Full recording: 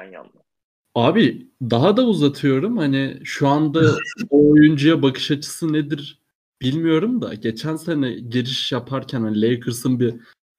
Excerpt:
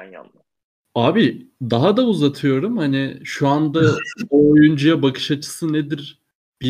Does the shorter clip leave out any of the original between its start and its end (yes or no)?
no